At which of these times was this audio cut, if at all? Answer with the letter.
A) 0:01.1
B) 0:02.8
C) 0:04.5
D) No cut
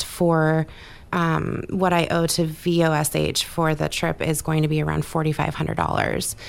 A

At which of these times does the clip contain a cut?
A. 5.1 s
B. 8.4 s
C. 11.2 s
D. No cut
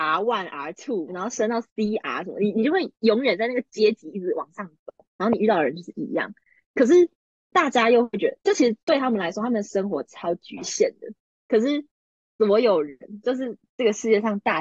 C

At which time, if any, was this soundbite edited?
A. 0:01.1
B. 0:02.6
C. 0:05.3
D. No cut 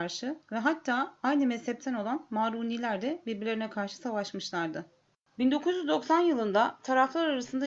C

